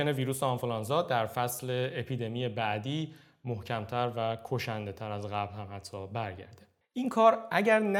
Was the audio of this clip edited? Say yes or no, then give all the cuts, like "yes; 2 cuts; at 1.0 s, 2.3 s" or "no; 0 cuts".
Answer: yes; 1 cut; at 6.8 s